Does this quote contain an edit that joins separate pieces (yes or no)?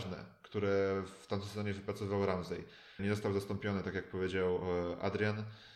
yes